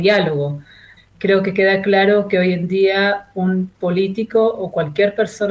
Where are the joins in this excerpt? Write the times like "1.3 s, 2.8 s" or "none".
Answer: 1.0 s